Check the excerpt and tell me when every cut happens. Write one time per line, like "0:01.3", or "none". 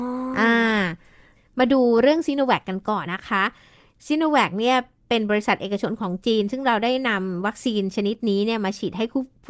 0:03.1